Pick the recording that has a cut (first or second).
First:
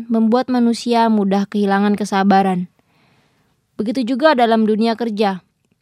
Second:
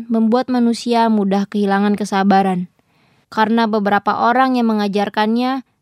second